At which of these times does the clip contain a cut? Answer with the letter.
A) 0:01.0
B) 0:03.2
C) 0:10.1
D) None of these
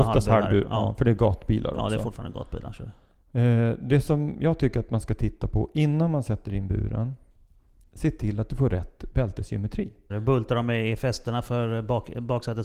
C